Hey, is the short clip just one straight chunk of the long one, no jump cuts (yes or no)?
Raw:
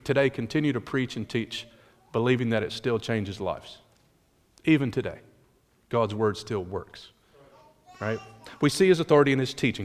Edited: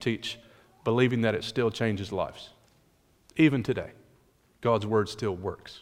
yes